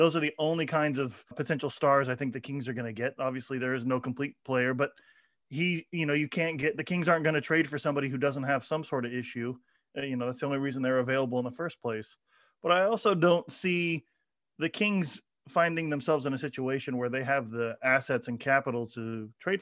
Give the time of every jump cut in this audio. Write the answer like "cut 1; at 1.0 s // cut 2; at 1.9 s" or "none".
cut 1; at 1.3 s

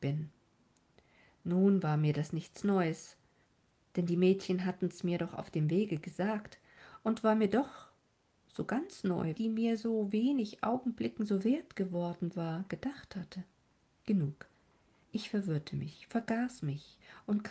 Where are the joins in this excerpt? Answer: cut 1; at 9.4 s

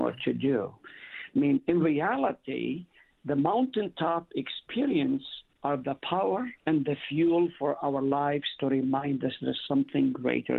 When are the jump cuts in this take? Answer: cut 1; at 6.6 s

